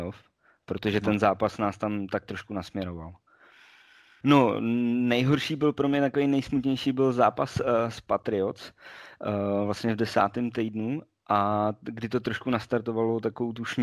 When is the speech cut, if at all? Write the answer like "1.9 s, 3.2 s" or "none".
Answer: 4.2 s